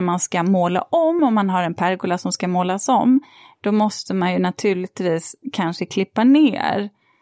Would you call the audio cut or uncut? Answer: uncut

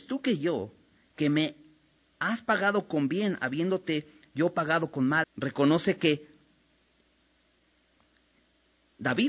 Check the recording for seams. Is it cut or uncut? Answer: cut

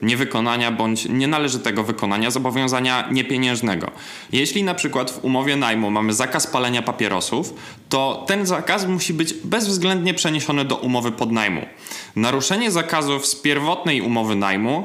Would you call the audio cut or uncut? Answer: cut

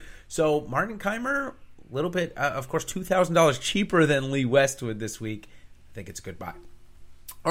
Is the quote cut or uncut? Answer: uncut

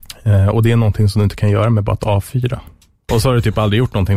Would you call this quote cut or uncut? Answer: cut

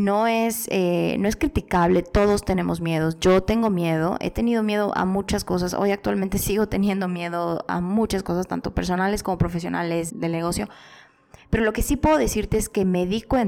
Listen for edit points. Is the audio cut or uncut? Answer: cut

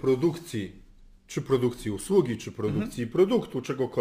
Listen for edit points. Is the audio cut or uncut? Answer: uncut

